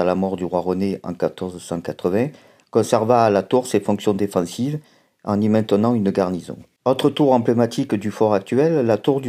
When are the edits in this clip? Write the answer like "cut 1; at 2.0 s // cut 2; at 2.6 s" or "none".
none